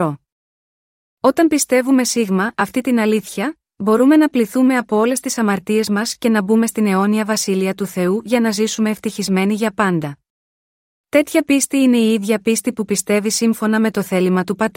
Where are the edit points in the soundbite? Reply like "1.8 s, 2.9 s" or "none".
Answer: 10.9 s